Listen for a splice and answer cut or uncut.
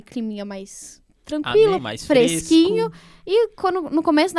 cut